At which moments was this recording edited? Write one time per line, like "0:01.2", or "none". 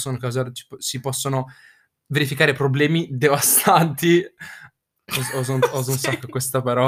none